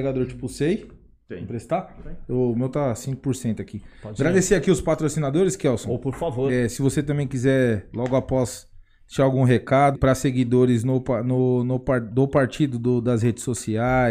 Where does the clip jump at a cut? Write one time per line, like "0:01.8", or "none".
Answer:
0:09.9